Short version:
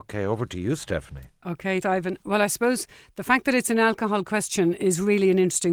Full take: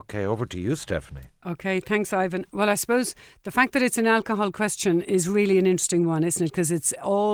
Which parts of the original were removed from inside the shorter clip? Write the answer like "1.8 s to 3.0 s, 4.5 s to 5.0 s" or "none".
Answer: 1.8 s to 2.1 s

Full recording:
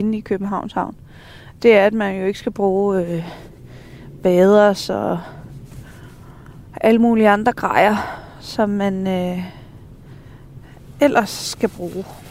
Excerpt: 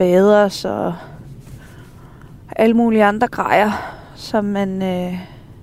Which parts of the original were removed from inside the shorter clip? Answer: none

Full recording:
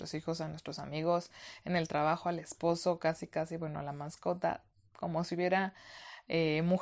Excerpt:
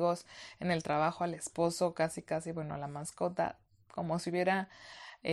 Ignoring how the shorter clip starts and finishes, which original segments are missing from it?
none

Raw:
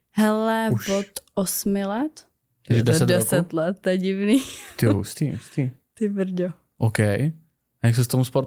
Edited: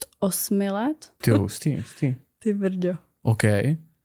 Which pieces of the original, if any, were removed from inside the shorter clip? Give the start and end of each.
2.3 s to 4.8 s

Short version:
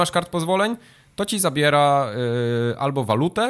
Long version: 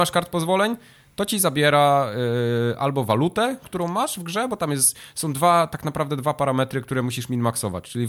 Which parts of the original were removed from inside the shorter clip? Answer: none

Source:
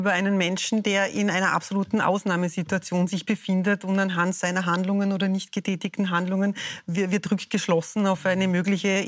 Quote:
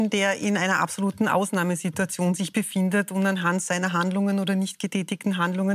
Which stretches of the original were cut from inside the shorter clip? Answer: none

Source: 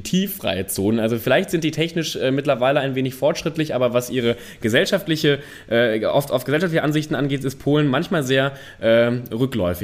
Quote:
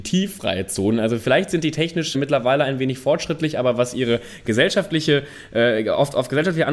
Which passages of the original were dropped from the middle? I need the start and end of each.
2.1 s to 2.3 s

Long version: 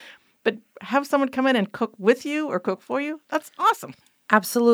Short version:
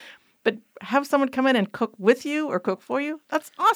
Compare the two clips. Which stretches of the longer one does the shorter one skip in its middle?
none

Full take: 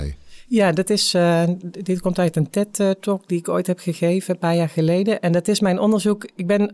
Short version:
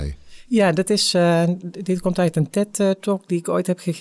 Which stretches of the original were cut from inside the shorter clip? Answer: none

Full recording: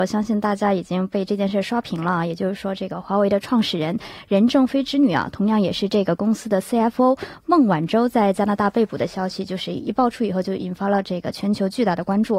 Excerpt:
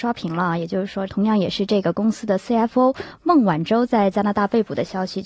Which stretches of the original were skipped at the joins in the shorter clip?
2.8 s to 5.3 s

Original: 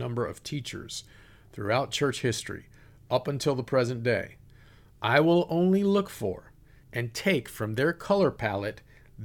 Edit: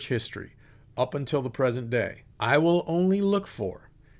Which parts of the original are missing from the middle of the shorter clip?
4.5 s to 4.9 s

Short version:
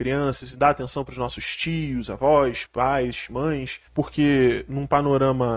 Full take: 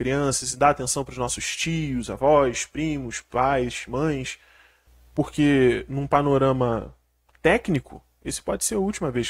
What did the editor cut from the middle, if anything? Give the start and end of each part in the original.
2.6 s to 3.2 s, 4.4 s to 5.1 s

